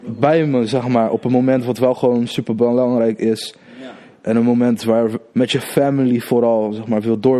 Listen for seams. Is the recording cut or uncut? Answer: cut